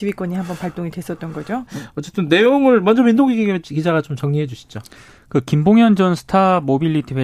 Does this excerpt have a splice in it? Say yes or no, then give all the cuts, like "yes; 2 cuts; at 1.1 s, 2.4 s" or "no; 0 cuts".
yes; 1 cut; at 1.7 s